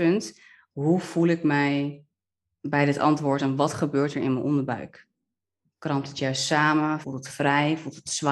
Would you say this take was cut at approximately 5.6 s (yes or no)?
no